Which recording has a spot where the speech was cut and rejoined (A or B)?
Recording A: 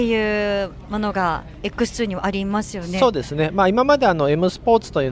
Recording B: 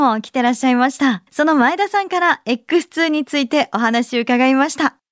B